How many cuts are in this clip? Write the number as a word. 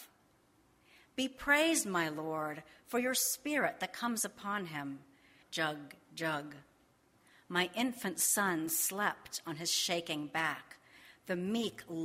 one